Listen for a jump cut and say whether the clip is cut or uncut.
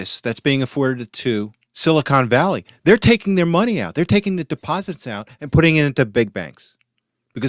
uncut